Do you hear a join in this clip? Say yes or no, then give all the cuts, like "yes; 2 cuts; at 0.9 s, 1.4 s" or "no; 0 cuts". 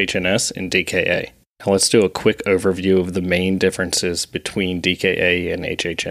no; 0 cuts